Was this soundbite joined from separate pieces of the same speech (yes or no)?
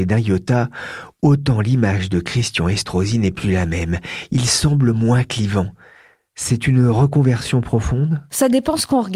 no